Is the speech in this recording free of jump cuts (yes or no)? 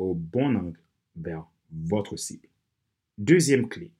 no